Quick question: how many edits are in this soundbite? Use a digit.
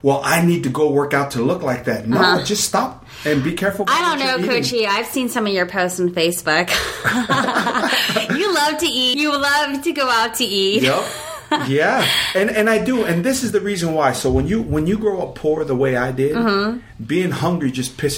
1